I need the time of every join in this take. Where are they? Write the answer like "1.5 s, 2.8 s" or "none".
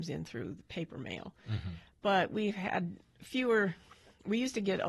none